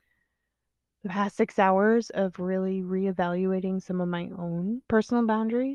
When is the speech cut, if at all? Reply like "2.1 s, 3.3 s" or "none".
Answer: 4.8 s